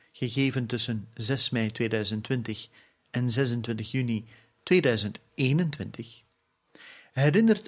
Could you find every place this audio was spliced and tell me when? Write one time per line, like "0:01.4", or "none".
none